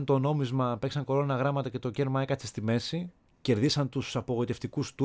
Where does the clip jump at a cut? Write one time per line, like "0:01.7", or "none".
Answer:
0:03.3